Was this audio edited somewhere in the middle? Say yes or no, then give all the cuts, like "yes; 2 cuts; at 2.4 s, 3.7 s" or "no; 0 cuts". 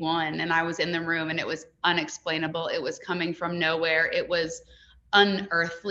no; 0 cuts